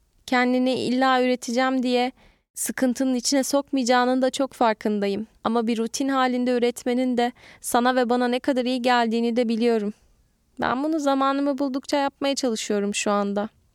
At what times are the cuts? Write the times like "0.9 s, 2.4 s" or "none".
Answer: none